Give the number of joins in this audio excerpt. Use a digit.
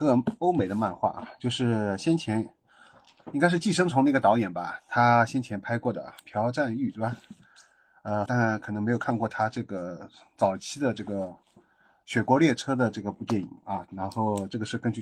2